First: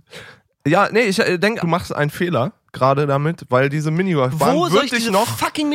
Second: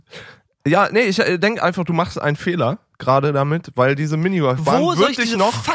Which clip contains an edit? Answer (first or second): first